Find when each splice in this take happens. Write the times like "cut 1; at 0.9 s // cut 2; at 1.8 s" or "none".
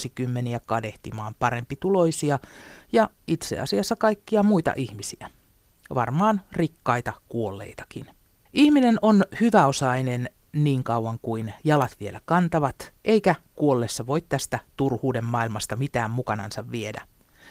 cut 1; at 8.5 s // cut 2; at 13.0 s

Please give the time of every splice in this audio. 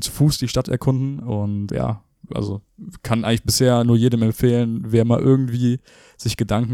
cut 1; at 1.7 s

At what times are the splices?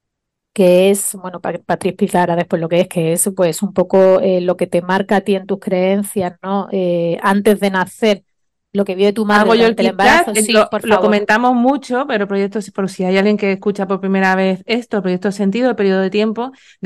none

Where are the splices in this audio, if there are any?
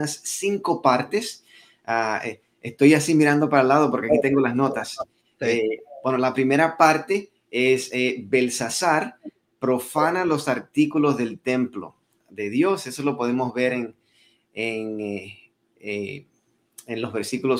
none

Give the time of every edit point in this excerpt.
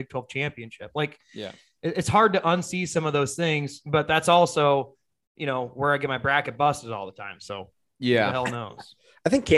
none

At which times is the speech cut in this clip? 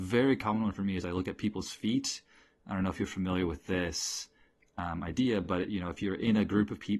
none

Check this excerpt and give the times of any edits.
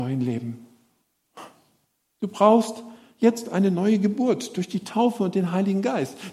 none

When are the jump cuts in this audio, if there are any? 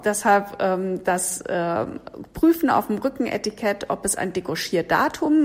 none

